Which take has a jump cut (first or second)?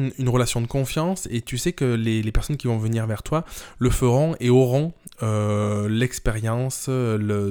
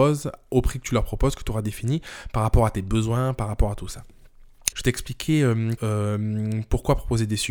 second